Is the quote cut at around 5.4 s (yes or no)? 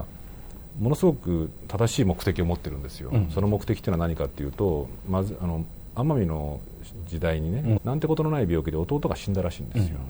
no